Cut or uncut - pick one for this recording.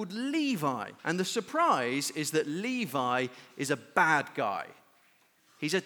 cut